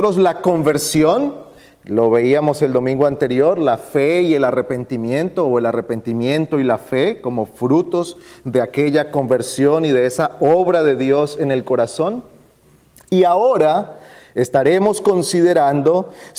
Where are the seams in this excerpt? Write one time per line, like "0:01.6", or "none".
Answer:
none